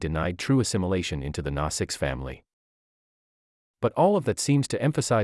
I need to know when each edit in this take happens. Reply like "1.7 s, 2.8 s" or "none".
none